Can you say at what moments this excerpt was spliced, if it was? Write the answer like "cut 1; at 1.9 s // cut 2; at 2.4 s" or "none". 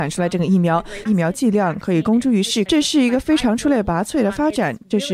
cut 1; at 1.1 s // cut 2; at 2.7 s